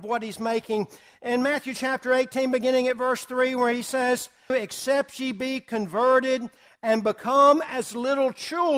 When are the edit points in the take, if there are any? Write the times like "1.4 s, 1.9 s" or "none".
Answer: 4.5 s